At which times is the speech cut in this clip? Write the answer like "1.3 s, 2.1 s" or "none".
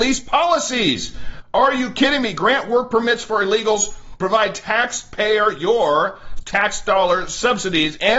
none